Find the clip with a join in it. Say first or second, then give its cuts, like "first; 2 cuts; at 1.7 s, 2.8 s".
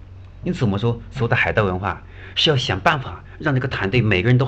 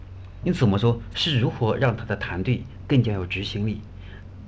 second; 1 cut; at 1.1 s